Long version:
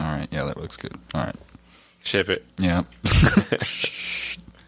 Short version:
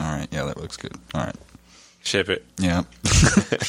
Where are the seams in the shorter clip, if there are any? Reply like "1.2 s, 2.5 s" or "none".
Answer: none